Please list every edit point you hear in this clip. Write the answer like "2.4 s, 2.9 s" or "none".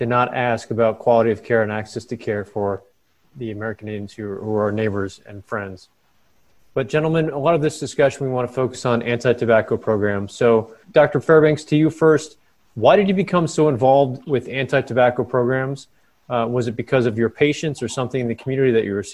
10.8 s